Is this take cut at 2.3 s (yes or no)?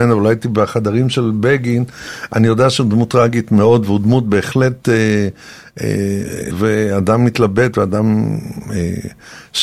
no